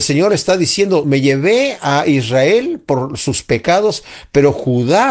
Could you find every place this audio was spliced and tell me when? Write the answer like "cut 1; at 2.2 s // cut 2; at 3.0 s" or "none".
none